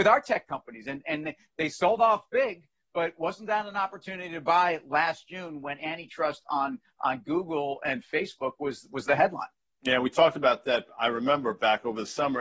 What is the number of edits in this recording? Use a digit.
0